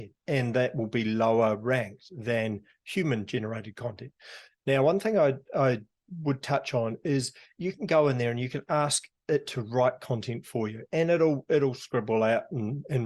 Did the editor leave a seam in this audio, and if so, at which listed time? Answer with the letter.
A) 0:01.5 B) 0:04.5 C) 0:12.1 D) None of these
B